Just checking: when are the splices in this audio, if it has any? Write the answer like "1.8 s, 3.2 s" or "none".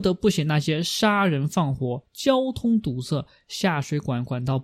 2.1 s